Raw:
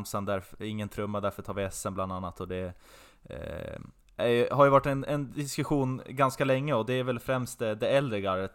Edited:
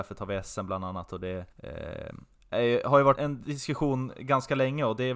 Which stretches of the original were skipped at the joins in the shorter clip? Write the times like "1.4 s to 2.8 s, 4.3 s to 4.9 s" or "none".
2.8 s to 3.2 s, 4.8 s to 5.0 s